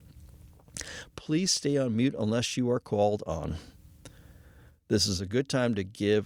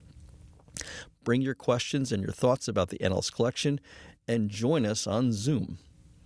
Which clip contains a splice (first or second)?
first